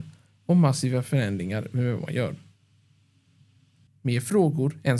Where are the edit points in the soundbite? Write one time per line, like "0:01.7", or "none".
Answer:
0:03.9